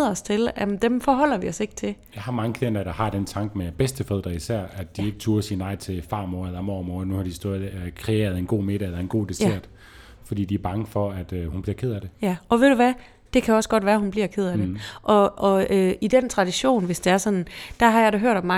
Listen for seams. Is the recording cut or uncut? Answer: uncut